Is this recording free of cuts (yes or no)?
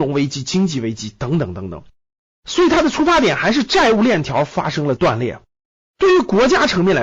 yes